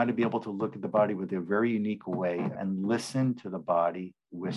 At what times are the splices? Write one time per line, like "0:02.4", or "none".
0:02.5